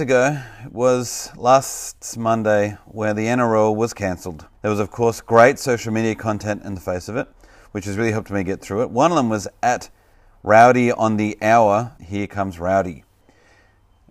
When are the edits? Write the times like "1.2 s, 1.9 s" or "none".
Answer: 4.5 s, 12.0 s